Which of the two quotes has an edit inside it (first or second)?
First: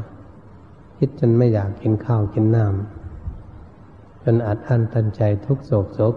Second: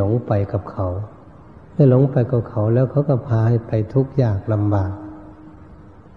second